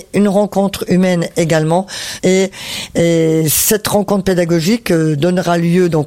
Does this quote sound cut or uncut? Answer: cut